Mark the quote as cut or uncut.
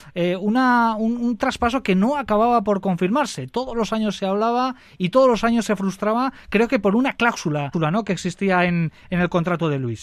uncut